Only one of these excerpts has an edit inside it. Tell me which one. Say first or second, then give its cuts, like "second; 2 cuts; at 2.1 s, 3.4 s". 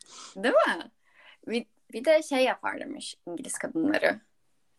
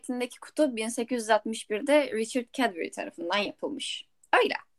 first; 1 cut; at 1.9 s